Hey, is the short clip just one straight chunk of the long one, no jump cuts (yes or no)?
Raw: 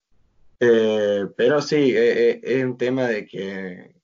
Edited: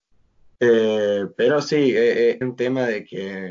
no